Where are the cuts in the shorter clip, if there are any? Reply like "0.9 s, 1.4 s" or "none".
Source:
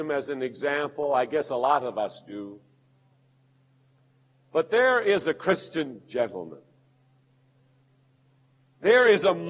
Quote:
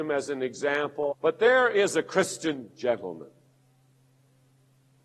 1.1 s